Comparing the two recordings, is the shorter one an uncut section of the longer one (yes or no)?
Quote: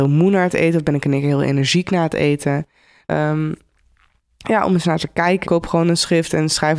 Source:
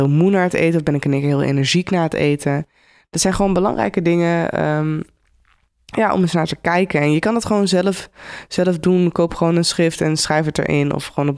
no